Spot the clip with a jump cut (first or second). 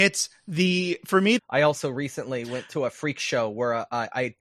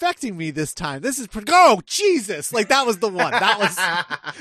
first